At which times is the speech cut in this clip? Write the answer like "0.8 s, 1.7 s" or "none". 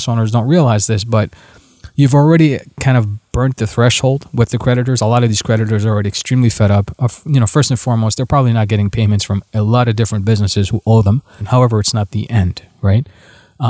11.4 s